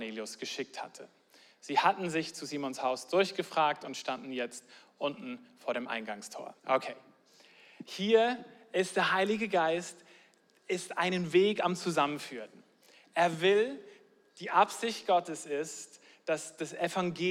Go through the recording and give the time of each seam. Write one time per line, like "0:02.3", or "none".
0:06.6